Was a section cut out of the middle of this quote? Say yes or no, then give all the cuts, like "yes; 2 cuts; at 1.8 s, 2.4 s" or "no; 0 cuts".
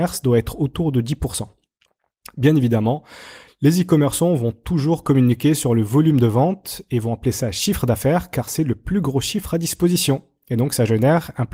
no; 0 cuts